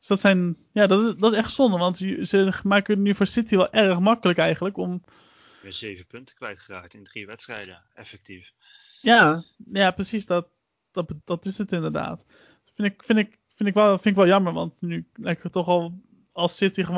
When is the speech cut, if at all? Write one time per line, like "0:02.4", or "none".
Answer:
0:11.2